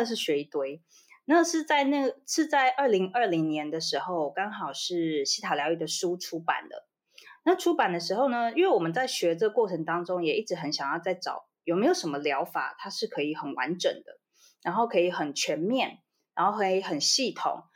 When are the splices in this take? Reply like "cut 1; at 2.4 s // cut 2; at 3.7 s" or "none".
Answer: none